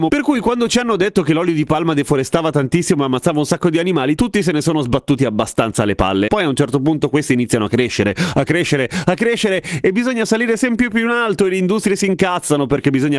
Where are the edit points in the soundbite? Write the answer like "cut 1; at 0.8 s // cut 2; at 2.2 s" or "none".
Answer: cut 1; at 6.3 s